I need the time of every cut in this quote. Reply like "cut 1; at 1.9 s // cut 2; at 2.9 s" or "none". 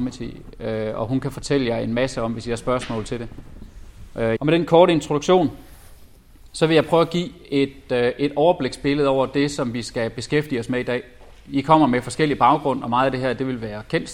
cut 1; at 4.4 s